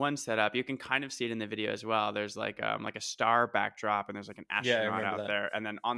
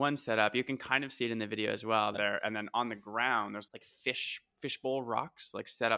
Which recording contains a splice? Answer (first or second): second